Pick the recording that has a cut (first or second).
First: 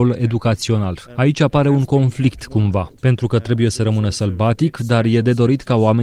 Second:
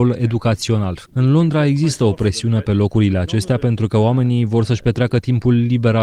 second